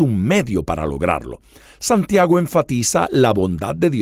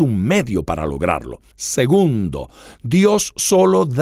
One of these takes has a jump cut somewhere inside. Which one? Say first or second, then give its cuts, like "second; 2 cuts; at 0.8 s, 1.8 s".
second; 1 cut; at 1.5 s